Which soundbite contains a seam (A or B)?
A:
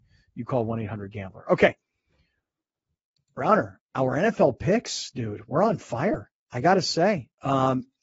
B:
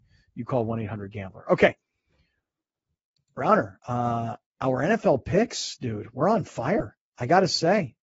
A